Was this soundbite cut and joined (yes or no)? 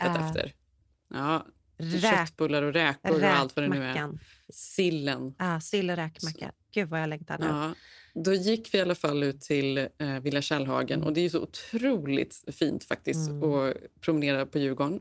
no